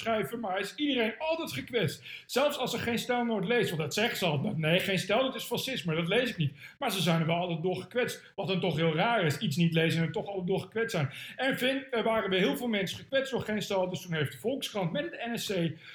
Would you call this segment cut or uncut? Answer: uncut